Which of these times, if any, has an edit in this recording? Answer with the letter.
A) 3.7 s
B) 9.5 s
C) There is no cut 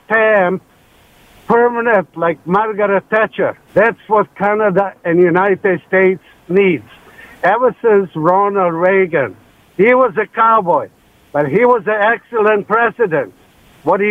A